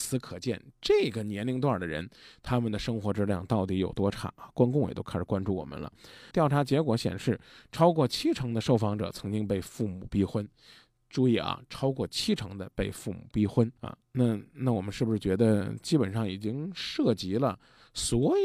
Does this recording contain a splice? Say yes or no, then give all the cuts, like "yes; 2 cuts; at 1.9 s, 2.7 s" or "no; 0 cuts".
yes; 2 cuts; at 6.3 s, 13.8 s